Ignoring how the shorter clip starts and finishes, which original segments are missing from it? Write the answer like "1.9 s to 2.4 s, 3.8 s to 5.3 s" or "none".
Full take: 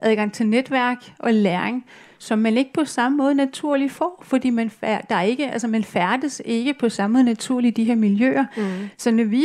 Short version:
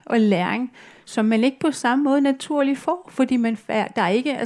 none